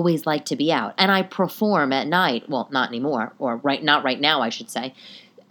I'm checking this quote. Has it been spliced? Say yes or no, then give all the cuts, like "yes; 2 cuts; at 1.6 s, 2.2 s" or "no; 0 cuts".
no; 0 cuts